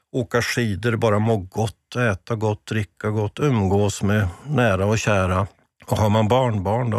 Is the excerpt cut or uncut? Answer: uncut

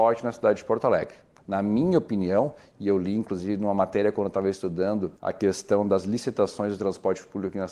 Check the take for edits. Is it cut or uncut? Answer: cut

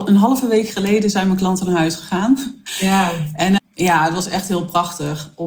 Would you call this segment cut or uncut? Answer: cut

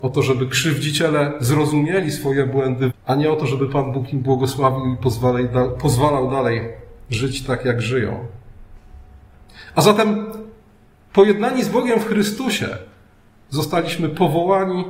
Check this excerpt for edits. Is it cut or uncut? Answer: cut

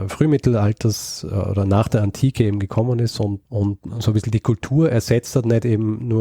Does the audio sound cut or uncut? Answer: cut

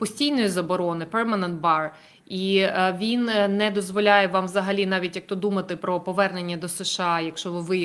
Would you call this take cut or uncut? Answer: uncut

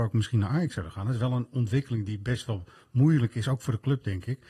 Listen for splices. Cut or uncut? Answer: uncut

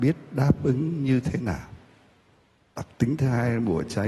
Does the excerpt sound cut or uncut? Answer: uncut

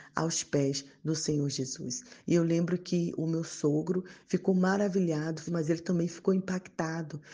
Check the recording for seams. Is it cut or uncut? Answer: cut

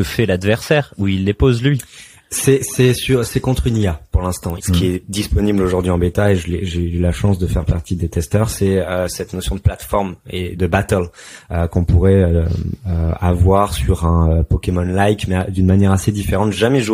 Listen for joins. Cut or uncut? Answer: cut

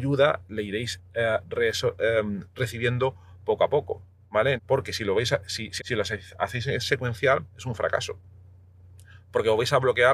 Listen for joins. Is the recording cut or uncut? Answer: cut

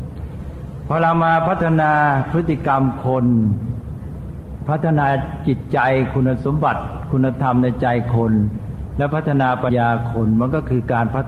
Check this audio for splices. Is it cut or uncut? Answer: cut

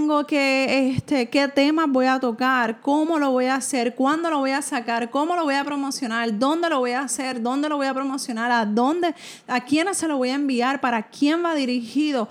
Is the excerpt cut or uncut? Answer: uncut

